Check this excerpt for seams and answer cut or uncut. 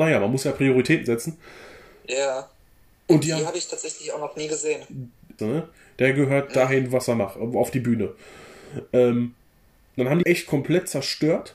cut